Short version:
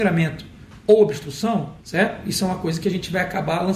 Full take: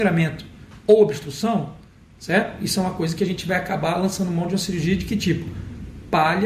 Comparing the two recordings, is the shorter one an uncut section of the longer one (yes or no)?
no